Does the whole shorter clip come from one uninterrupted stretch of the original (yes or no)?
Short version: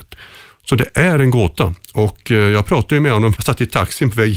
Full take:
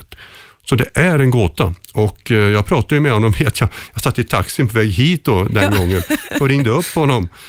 no